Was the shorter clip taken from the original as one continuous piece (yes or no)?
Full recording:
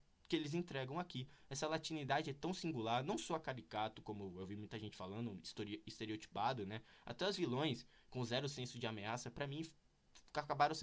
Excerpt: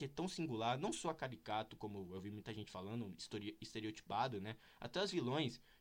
yes